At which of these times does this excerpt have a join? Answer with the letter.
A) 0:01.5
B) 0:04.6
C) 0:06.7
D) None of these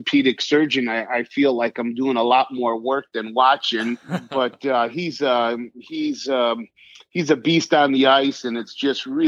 D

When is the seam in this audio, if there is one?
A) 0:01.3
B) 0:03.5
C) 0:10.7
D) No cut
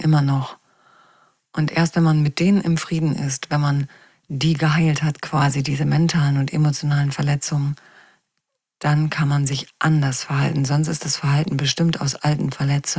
D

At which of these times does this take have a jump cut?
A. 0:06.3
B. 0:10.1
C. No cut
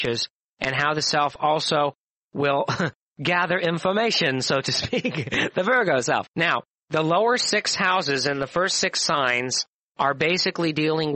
A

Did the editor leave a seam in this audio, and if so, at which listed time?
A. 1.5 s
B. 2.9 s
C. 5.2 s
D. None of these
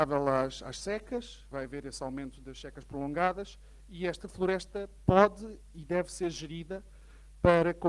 A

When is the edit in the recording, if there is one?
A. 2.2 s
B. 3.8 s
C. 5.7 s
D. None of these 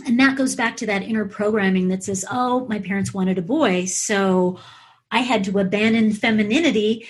D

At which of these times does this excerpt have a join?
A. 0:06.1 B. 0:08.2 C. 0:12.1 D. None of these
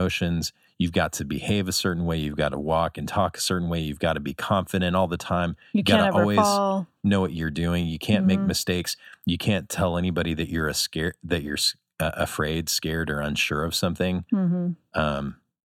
D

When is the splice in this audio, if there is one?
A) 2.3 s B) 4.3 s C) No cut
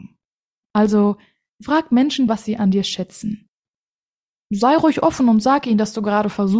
A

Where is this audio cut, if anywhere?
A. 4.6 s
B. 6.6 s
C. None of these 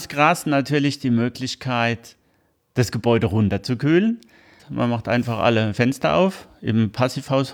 A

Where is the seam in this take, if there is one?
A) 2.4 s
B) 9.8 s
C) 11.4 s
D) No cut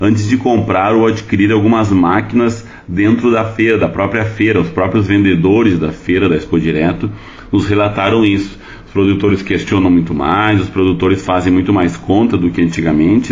D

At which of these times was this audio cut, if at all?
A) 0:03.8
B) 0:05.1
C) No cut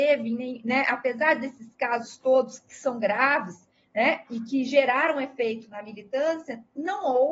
C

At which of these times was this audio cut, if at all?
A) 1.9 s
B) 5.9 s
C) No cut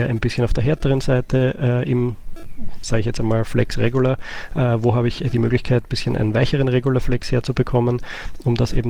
C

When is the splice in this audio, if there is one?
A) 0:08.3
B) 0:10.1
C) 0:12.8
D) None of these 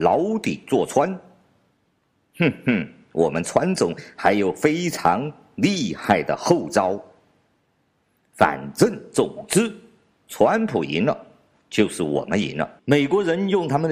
C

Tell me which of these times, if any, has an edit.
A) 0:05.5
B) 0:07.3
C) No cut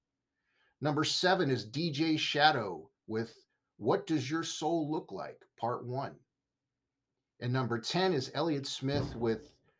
C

